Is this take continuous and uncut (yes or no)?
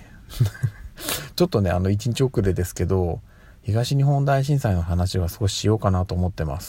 yes